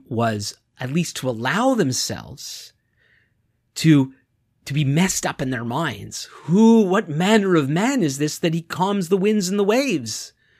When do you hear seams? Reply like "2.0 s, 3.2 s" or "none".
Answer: none